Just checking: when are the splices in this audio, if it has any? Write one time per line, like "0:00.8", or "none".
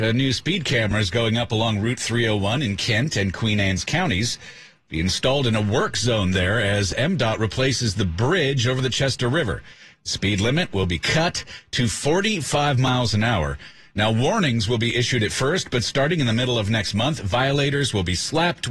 none